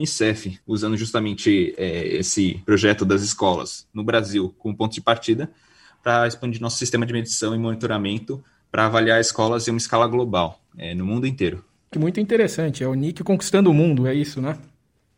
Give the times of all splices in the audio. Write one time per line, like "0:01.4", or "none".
0:11.9